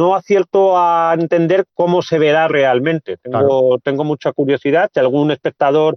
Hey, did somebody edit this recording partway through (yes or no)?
no